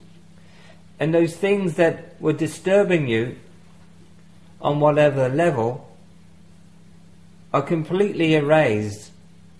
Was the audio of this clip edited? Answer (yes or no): no